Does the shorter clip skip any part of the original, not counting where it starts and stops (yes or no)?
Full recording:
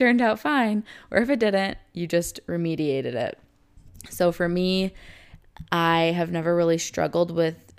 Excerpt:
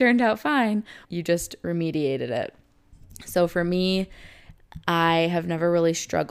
yes